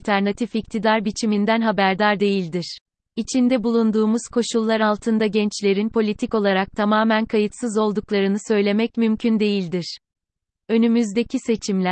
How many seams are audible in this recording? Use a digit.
2